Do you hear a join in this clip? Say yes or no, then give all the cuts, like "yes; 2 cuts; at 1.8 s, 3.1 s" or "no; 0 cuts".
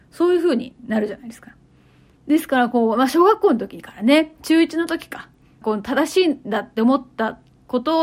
yes; 2 cuts; at 2.2 s, 5.6 s